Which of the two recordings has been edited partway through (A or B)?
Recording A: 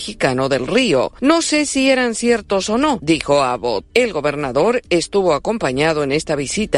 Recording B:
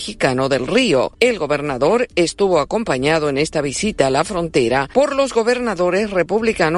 B